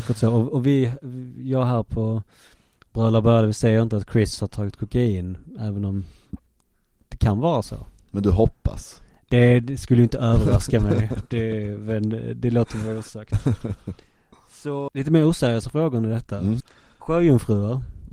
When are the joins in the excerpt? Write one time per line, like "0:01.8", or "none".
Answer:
0:14.9
0:16.6